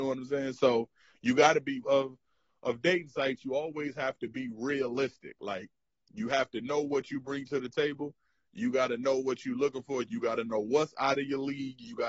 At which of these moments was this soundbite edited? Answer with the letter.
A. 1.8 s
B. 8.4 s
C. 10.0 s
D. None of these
A